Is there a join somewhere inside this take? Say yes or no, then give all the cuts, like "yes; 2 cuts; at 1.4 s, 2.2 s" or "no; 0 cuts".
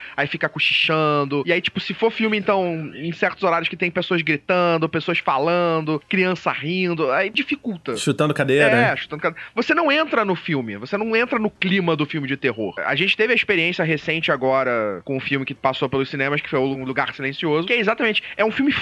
no; 0 cuts